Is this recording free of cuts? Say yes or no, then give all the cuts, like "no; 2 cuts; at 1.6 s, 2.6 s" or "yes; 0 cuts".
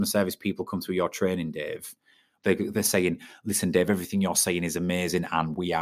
no; 1 cut; at 2.4 s